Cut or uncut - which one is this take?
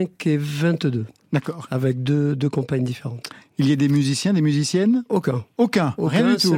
uncut